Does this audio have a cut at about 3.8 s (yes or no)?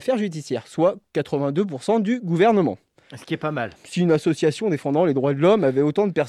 yes